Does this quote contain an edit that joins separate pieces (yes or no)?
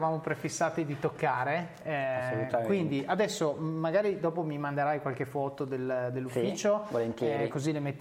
no